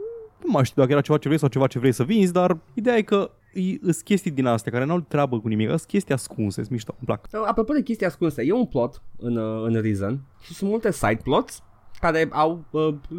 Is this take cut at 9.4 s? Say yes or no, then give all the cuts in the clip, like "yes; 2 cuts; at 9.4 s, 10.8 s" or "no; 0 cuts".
no; 1 cut; at 2.7 s